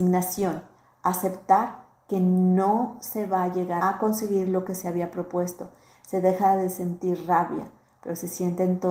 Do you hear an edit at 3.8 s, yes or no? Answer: yes